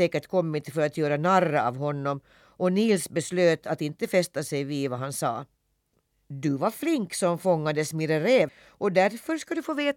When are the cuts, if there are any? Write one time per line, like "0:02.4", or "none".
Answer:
0:08.5